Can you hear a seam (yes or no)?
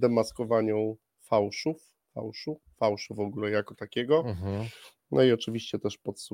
no